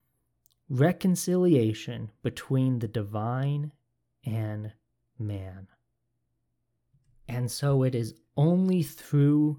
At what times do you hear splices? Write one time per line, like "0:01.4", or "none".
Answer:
none

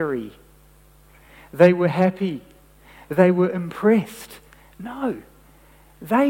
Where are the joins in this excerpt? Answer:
none

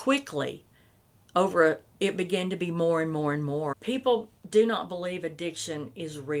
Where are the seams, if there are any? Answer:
0:01.9
0:03.7

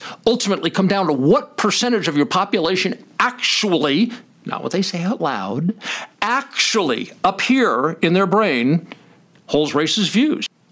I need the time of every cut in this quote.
none

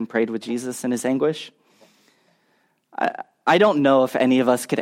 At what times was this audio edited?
none

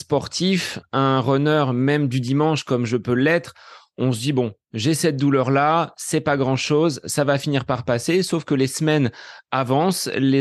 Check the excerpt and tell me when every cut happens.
none

